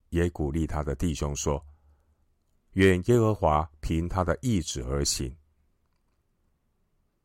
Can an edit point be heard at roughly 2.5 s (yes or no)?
yes